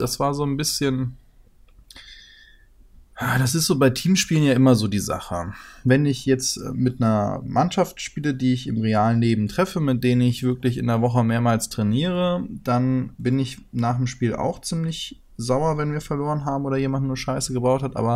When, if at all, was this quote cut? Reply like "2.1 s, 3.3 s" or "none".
none